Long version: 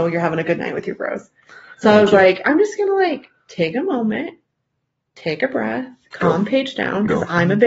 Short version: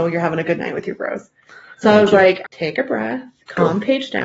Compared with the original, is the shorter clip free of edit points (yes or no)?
no